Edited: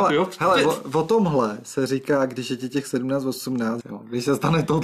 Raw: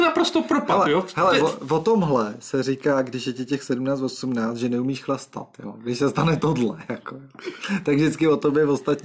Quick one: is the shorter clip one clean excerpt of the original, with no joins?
no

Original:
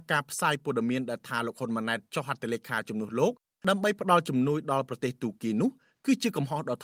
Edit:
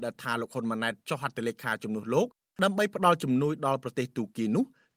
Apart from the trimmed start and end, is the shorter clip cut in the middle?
no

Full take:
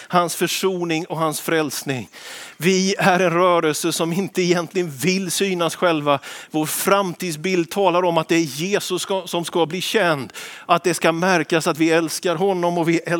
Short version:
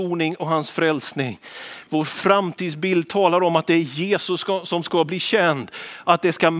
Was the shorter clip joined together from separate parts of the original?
yes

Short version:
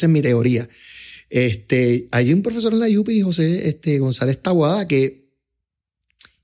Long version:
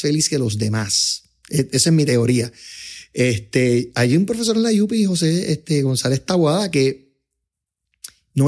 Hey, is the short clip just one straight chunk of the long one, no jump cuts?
yes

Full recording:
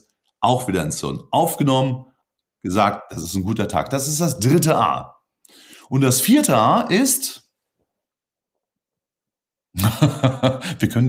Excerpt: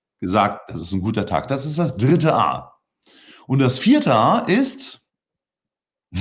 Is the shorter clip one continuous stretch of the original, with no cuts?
no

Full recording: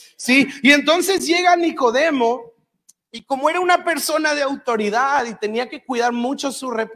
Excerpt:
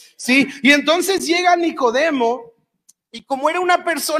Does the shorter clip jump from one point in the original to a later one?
no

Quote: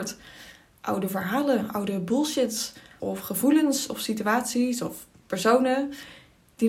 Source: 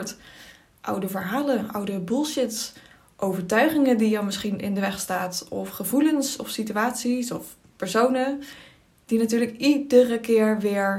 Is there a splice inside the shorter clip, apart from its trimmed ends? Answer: yes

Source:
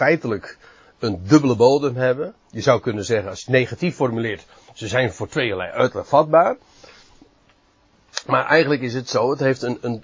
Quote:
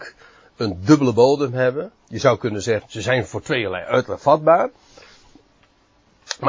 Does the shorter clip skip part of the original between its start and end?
yes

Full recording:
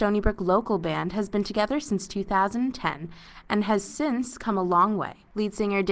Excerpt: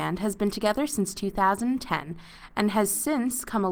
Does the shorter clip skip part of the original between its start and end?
no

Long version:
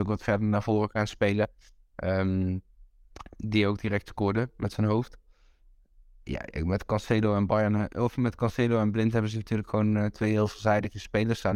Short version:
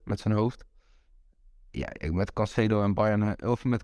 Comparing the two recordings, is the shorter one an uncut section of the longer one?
yes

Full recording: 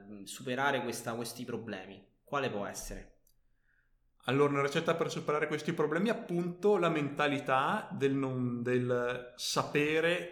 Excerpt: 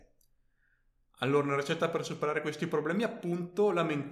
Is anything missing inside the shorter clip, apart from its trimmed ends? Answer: no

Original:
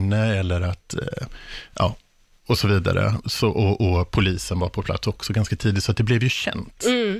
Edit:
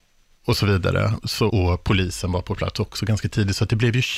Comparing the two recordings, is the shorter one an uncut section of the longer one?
no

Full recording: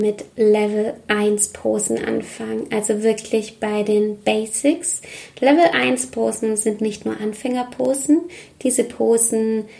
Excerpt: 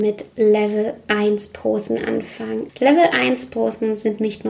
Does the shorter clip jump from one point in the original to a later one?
yes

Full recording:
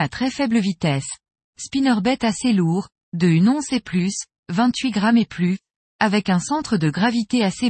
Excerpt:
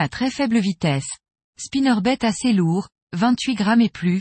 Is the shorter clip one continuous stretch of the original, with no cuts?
no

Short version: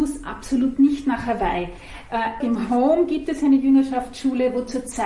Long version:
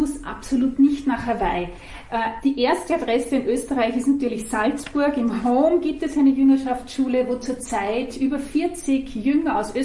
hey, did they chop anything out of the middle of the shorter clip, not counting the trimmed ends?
yes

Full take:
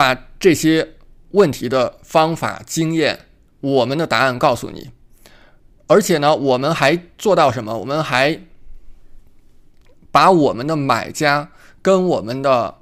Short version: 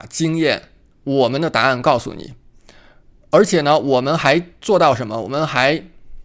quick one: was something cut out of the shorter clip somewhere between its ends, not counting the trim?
no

